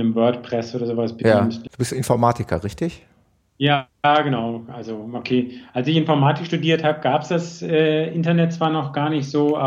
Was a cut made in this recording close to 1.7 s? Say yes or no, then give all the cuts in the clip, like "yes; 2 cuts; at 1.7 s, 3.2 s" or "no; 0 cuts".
yes; 1 cut; at 1.7 s